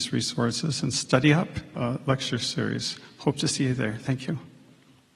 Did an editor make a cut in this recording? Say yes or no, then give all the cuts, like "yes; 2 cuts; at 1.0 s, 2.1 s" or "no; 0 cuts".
yes; 1 cut; at 1.7 s